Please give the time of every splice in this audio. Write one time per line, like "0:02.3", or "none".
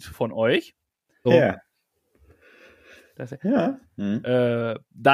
0:01.3
0:03.8

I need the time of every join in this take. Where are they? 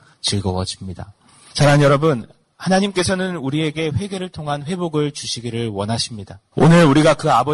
0:06.5

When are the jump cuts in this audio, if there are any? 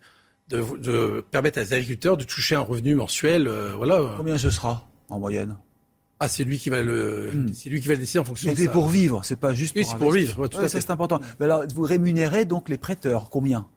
none

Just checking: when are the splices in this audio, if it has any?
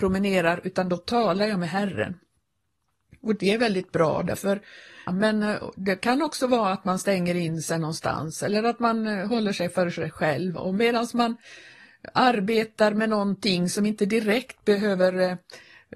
0:05.1

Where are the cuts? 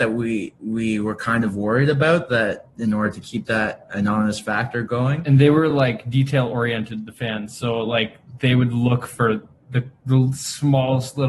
none

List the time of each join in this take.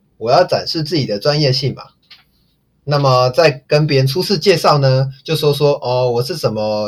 none

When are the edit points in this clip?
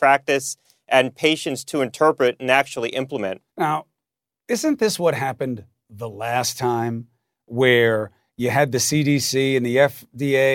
0:03.5

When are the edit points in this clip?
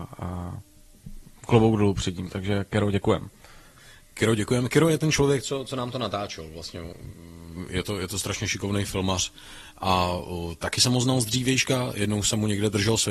none

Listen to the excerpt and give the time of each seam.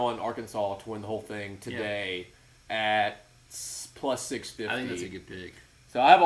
none

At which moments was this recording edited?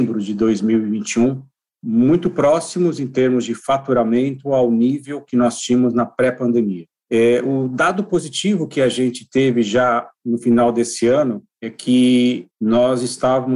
0:12.5

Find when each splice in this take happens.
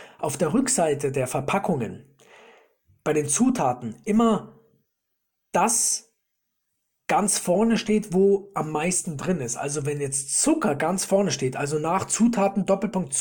none

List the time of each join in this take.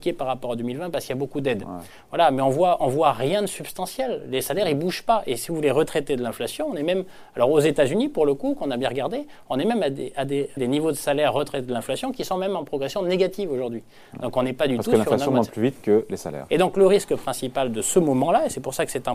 0:10.6
0:16.5

